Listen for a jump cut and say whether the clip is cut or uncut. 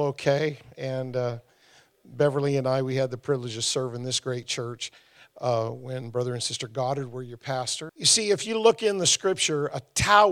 cut